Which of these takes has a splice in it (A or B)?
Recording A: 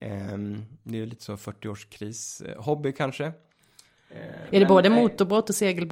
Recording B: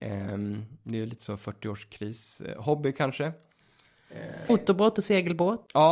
B